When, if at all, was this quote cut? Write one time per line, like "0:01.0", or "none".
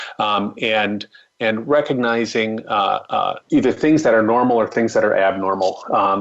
0:03.4

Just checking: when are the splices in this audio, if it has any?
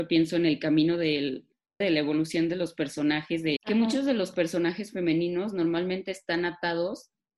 0:01.8
0:03.6

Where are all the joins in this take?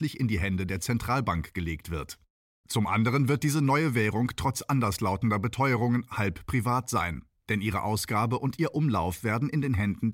none

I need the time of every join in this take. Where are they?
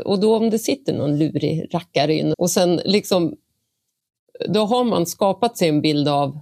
0:02.3

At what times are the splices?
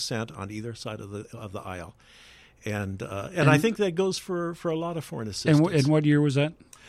none

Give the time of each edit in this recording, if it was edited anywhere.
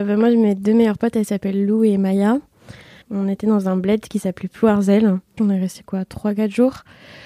0:03.0
0:05.4

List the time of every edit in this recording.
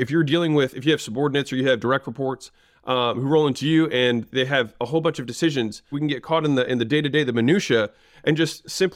0:05.9

